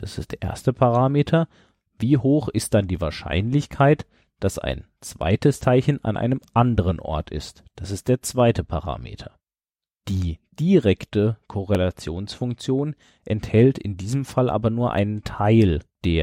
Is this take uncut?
yes; 0 cuts

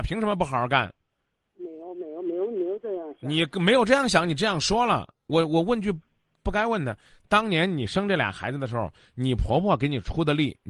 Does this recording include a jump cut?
no; 0 cuts

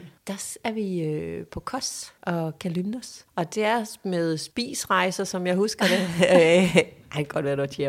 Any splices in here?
no; 0 cuts

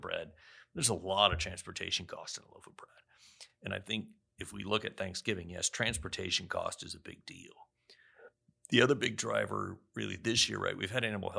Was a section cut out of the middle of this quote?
no; 0 cuts

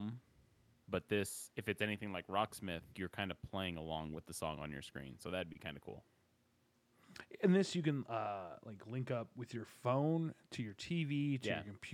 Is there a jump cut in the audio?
yes; 1 cut; at 2.9 s

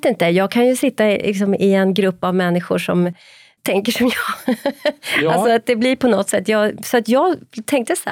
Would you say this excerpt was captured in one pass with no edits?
yes; 0 cuts

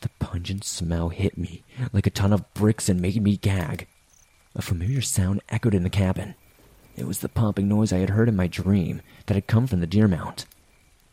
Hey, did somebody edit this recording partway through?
no; 0 cuts

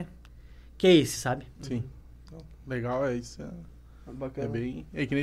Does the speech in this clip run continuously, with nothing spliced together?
yes; 0 cuts

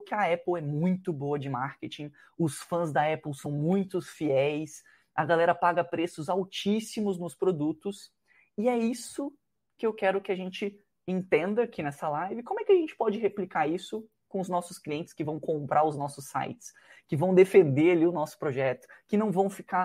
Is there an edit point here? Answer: no; 0 cuts

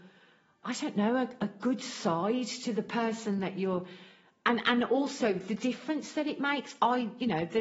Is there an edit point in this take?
no; 0 cuts

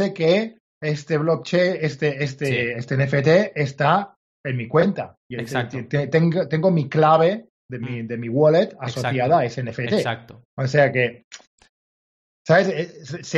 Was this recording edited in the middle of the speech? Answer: no; 0 cuts

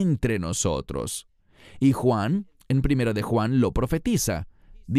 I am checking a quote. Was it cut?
no; 0 cuts

